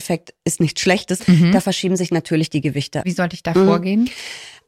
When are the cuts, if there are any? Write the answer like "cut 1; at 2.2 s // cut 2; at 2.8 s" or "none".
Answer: cut 1; at 1.2 s // cut 2; at 3.0 s

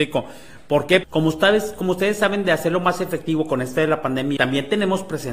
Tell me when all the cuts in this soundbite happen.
cut 1; at 1.0 s // cut 2; at 4.4 s

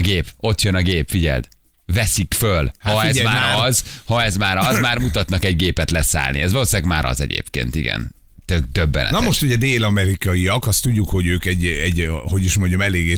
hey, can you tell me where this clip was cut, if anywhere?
cut 1; at 2.8 s

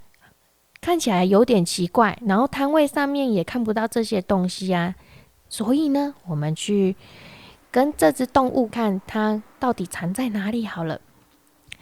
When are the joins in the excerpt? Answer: cut 1; at 5.5 s // cut 2; at 8.7 s

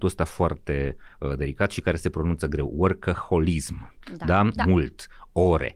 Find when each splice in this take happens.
cut 1; at 4.6 s

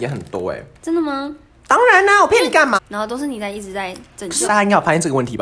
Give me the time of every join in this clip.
cut 1; at 2.7 s // cut 2; at 4.4 s

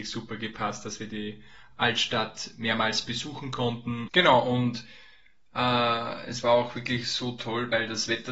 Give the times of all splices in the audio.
cut 1; at 4.1 s

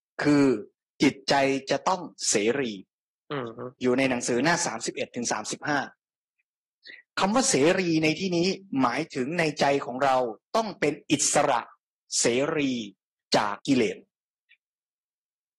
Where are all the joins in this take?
cut 1; at 13.6 s

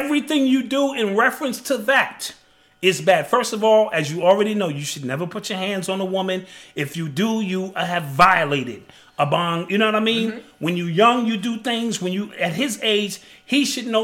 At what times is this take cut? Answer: none

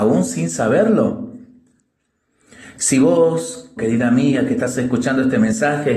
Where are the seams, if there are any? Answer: cut 1; at 3.8 s

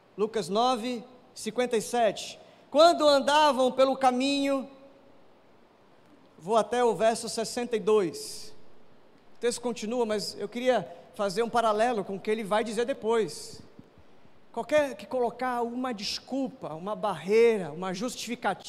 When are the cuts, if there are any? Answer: cut 1; at 9.3 s

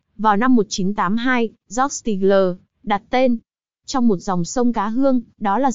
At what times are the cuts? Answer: none

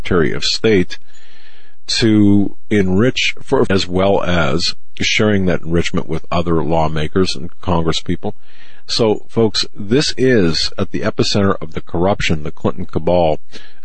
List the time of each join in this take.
cut 1; at 3.7 s

